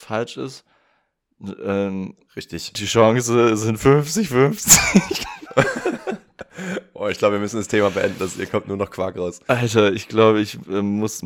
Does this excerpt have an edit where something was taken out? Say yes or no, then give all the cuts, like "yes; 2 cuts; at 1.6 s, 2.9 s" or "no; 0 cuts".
no; 0 cuts